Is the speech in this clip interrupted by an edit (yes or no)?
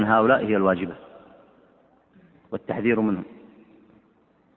no